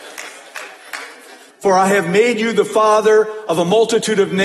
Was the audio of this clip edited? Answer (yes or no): yes